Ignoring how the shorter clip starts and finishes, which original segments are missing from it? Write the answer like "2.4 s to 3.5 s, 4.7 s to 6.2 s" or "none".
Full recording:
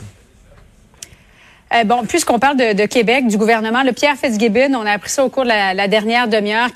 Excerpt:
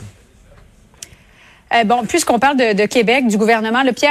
none